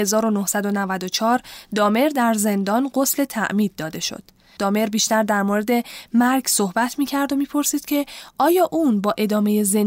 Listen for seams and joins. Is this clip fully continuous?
no; 1 cut; at 4.6 s

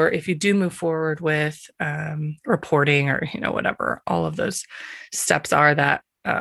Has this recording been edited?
no; 0 cuts

